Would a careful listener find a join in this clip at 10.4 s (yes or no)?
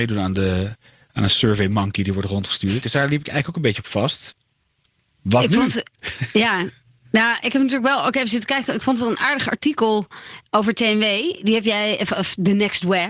yes